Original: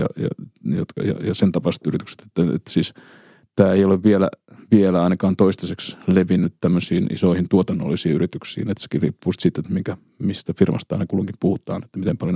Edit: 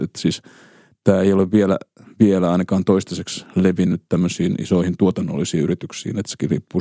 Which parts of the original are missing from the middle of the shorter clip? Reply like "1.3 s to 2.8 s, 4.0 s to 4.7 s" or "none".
none